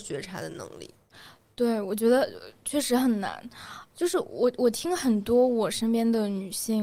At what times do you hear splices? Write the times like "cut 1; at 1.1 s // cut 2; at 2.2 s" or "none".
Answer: cut 1; at 3.9 s